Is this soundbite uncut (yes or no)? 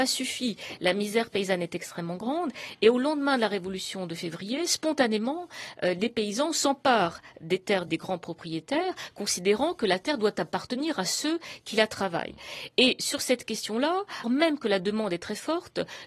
no